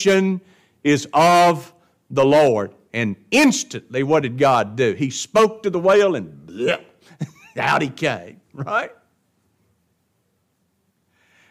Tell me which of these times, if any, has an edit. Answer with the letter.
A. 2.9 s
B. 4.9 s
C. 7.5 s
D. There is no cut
D